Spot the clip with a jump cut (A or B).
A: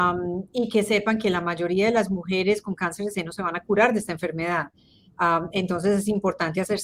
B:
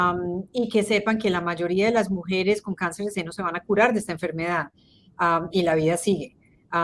B